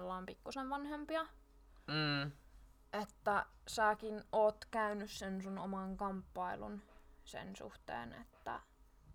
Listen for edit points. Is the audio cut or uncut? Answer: uncut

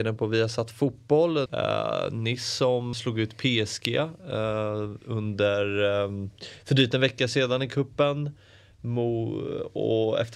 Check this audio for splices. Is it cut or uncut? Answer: cut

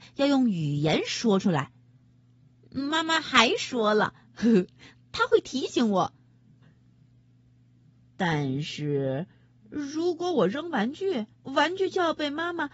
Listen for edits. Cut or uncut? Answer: cut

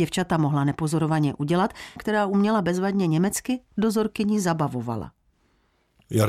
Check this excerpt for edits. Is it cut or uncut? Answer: cut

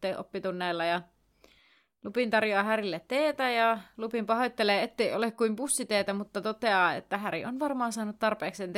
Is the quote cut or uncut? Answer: uncut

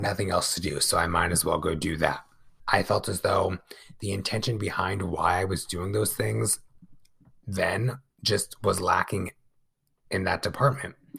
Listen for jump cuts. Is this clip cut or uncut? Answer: cut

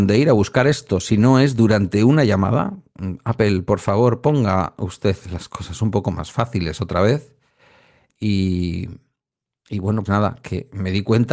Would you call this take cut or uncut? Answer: cut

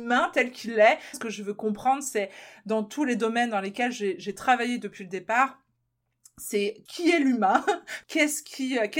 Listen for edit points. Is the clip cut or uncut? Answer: cut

